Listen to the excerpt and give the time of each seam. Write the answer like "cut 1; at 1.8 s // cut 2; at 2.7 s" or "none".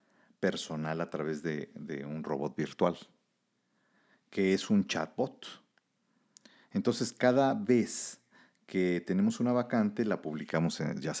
none